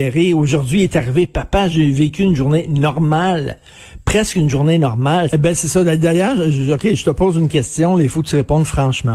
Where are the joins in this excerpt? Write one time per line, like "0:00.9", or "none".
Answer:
0:05.3